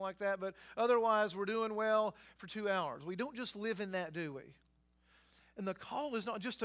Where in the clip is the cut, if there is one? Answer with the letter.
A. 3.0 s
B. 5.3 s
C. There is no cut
C